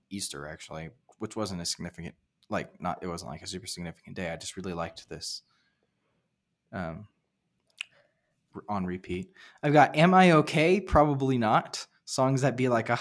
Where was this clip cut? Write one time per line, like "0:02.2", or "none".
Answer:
none